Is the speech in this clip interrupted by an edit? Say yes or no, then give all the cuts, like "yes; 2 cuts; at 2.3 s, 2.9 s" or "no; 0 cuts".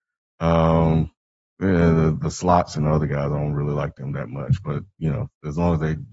no; 0 cuts